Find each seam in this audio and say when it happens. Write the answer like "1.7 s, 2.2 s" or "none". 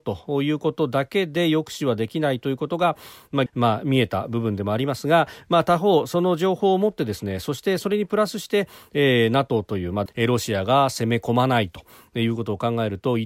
3.5 s, 10.1 s